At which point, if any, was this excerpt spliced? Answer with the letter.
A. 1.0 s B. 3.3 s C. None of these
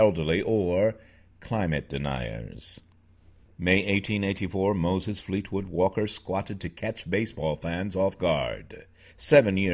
C